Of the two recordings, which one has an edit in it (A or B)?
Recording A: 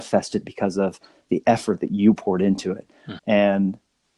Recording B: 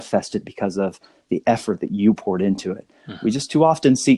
A